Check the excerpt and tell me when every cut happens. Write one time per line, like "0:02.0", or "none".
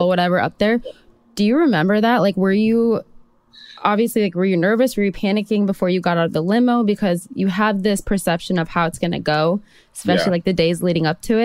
none